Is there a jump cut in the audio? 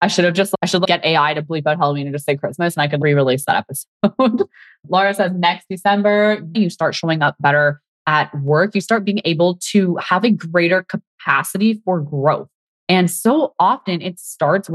yes; 1 cut; at 6.5 s

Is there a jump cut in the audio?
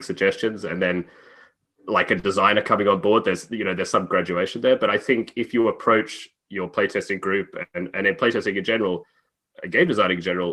no; 0 cuts

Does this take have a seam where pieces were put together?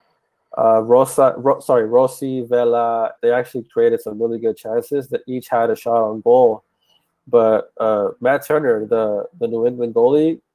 yes; 1 cut; at 3.2 s

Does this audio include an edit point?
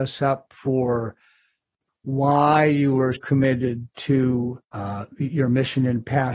yes; 3 cuts; at 1.9 s, 3.1 s, 4.6 s

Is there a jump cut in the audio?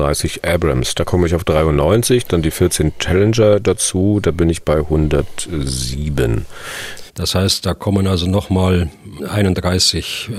yes; 2 cuts; at 7.1 s, 9.2 s

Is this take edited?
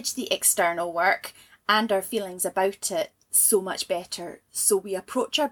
no; 0 cuts

